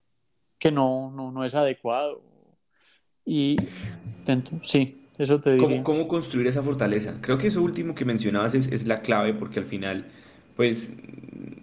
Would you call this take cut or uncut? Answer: uncut